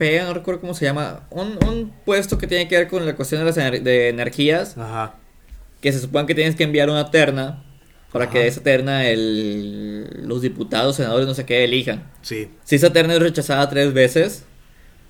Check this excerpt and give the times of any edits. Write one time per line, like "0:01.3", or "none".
0:12.6